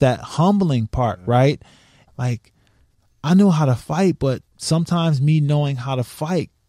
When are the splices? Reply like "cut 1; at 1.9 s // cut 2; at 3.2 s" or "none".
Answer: cut 1; at 2.1 s // cut 2; at 4.5 s

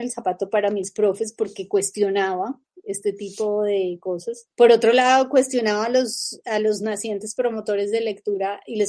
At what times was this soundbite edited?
none

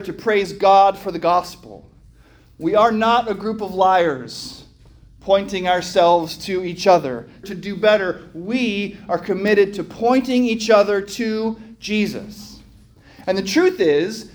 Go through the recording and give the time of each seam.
cut 1; at 7.4 s

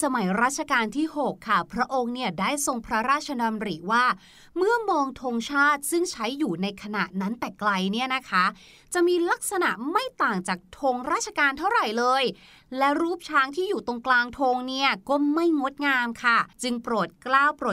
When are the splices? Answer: cut 1; at 16.5 s

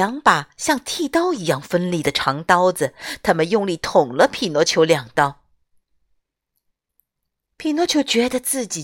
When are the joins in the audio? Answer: cut 1; at 6.9 s

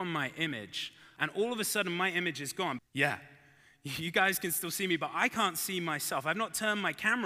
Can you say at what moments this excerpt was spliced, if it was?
cut 1; at 1.2 s // cut 2; at 2.8 s

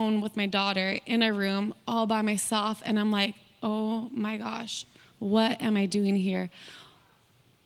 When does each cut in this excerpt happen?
none

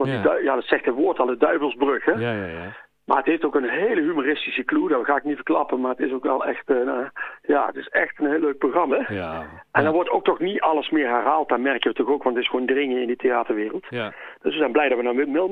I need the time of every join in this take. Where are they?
cut 1; at 8.9 s

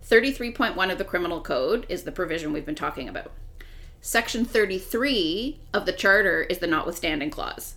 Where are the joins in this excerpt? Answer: none

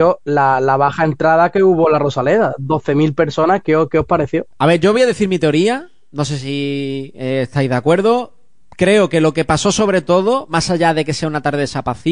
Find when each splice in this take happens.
none

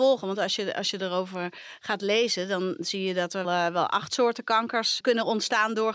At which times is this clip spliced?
cut 1; at 3.4 s

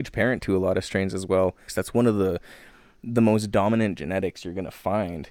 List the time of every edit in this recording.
cut 1; at 1.7 s

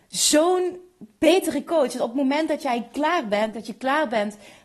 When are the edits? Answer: cut 1; at 3.5 s

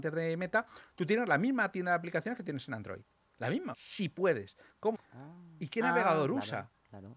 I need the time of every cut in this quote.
cut 1; at 3.7 s // cut 2; at 4.9 s

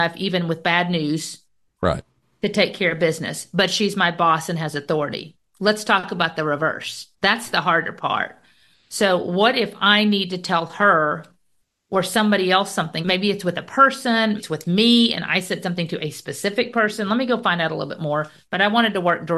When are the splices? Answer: cut 1; at 7.2 s // cut 2; at 13.0 s // cut 3; at 14.4 s

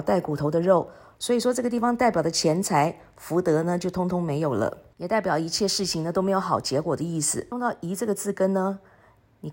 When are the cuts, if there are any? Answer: cut 1; at 1.2 s

